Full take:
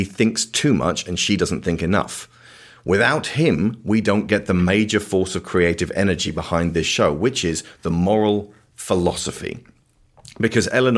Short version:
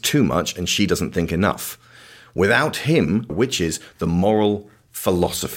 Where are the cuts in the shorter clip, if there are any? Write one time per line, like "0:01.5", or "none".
0:03.3